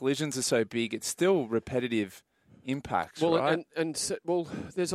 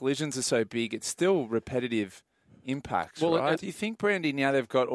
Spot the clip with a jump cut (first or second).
second